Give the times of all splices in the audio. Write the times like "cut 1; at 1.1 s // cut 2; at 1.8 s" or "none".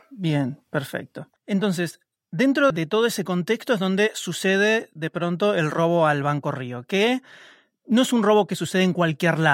cut 1; at 1.4 s // cut 2; at 2.7 s